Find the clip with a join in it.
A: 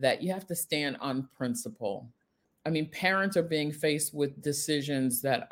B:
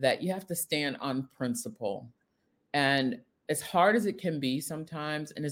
A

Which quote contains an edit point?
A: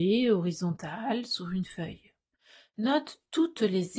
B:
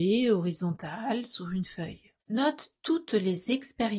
B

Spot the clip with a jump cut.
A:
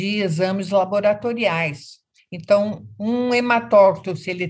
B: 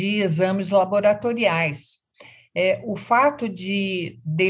A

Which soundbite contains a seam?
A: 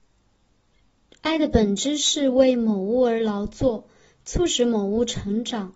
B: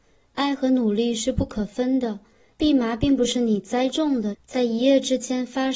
B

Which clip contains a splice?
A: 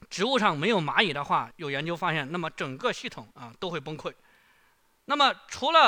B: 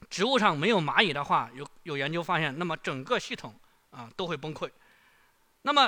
A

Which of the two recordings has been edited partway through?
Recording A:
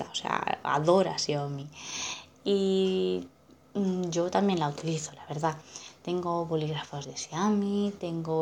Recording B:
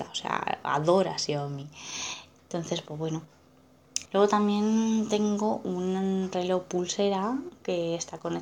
B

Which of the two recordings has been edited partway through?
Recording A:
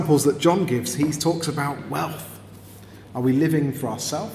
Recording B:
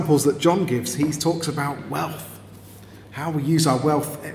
A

